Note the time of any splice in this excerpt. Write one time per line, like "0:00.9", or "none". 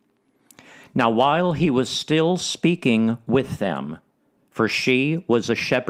0:04.4